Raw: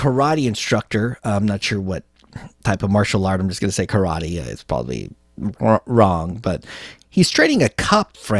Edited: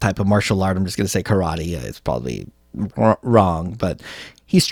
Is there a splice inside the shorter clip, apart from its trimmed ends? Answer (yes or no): no